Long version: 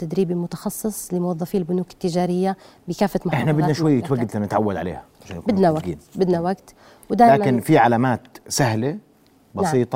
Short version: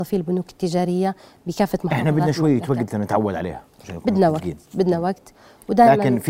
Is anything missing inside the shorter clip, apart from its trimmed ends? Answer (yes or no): no